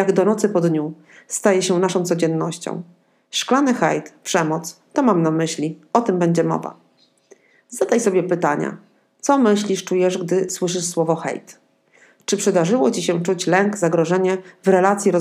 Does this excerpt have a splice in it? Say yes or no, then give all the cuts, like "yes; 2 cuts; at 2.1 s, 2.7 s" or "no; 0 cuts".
no; 0 cuts